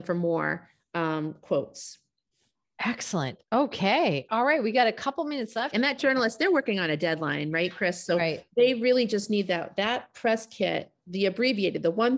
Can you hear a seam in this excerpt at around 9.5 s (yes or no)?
no